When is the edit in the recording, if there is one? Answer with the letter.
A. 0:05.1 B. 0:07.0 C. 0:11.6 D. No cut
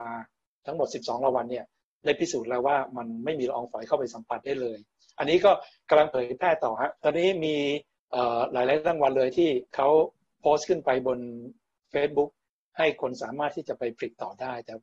B